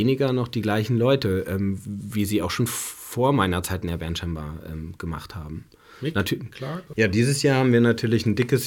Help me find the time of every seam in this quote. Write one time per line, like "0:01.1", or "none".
0:06.9